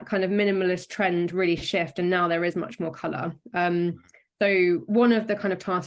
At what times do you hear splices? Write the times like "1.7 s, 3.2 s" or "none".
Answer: none